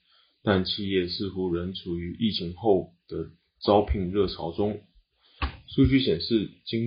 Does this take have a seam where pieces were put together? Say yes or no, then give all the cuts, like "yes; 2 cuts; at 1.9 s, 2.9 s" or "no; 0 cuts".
no; 0 cuts